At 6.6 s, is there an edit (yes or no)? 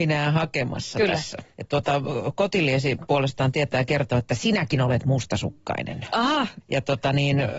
yes